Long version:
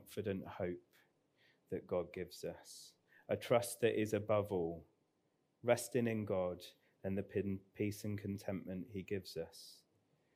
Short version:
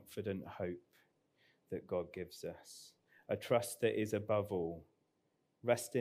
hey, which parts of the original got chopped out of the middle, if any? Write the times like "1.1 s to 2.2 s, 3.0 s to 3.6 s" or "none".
none